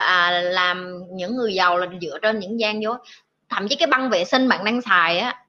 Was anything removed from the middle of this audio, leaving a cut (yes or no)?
no